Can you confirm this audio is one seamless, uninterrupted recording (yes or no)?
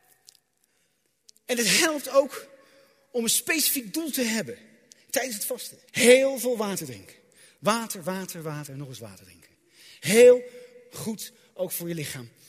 no